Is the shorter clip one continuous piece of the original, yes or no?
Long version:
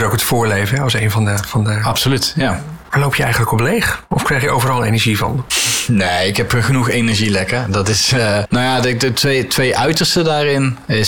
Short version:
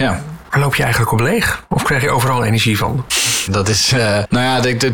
no